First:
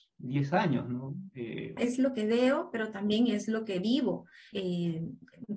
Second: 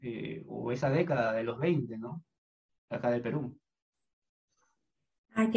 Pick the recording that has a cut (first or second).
first